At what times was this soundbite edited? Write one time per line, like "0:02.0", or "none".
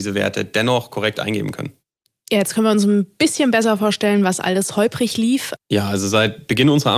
0:05.6

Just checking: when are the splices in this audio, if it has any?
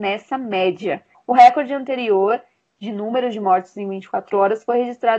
0:01.1

